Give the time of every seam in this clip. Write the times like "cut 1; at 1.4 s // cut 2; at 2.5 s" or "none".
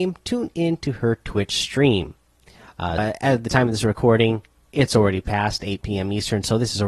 cut 1; at 3.0 s